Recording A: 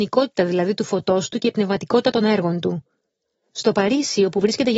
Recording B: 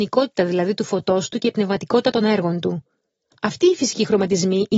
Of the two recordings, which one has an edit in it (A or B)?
B